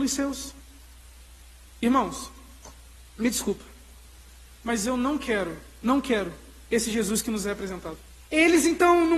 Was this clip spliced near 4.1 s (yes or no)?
no